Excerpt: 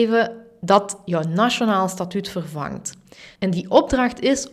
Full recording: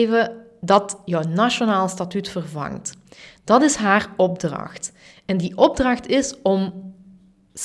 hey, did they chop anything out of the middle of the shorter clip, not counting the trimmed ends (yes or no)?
yes